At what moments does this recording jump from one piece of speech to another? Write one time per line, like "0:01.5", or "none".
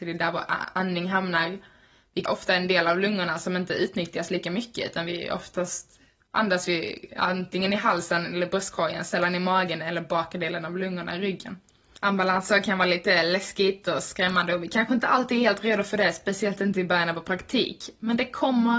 0:02.3
0:12.0

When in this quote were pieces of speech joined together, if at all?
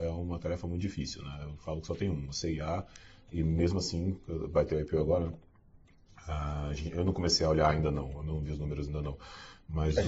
none

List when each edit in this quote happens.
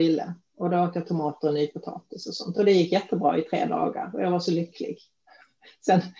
none

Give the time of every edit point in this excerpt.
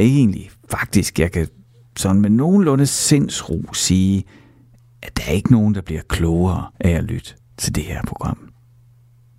0:06.7

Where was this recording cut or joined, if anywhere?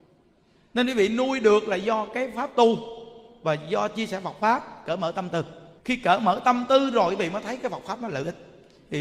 0:05.8

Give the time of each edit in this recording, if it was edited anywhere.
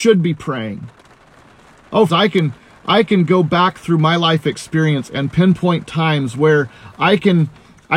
0:02.1

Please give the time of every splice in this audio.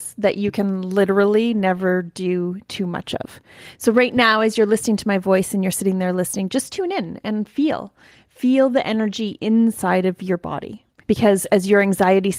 0:11.0

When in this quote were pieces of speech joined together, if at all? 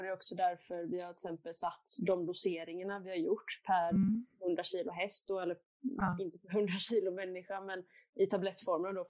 none

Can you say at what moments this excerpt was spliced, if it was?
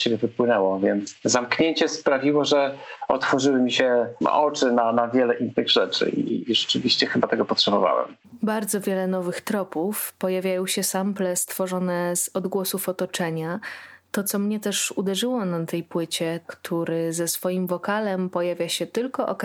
0:16.4

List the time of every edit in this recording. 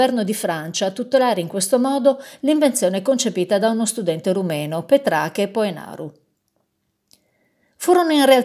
none

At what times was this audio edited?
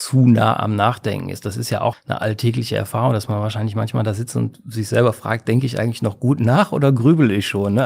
0:01.9

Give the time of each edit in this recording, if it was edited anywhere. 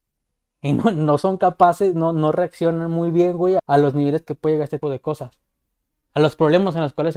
0:03.6
0:04.8

